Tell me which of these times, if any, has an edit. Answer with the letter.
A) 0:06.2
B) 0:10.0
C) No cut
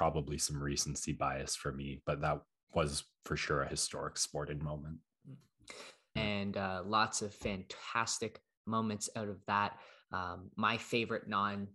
A